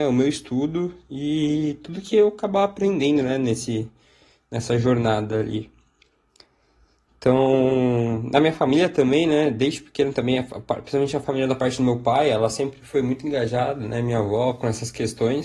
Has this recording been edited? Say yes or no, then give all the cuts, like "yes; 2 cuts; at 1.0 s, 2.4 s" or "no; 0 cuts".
no; 0 cuts